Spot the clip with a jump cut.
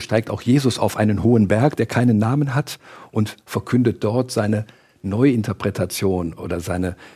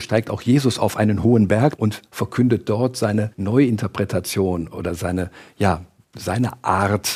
second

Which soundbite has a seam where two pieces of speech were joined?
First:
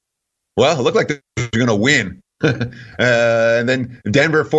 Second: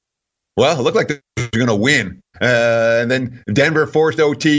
second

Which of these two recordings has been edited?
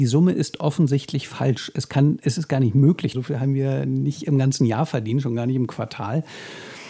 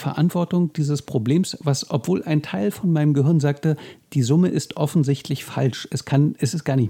first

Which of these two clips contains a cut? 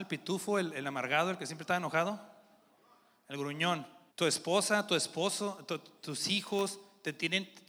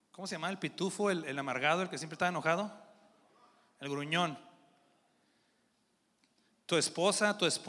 first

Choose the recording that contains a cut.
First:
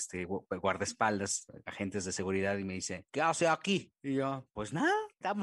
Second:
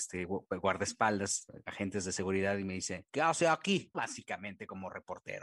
second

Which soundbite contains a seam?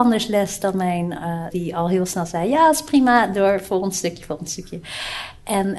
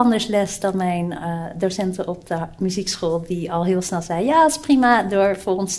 first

